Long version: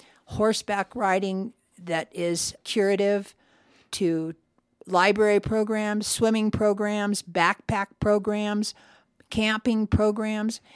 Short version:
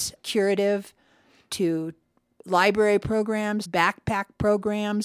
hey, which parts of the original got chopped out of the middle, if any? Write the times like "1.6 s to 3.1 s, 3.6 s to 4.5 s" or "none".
6.0 s to 7.2 s